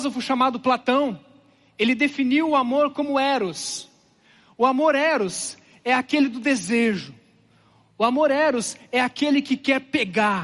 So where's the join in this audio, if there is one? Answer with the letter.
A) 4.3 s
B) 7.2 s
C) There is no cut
C